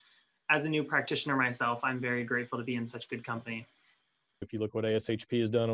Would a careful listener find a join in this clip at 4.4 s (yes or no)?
yes